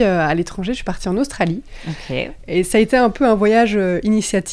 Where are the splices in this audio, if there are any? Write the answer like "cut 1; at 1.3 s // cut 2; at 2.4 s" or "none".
none